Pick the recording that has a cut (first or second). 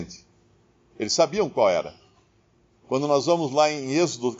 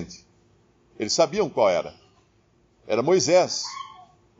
first